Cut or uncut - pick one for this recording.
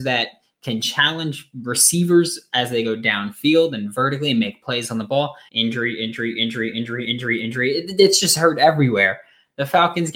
cut